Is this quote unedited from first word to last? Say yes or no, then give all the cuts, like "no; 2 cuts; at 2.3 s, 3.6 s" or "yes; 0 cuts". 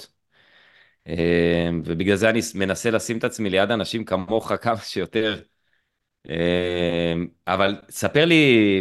yes; 0 cuts